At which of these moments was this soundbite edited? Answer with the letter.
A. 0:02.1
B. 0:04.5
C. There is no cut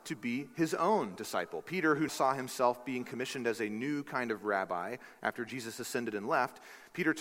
A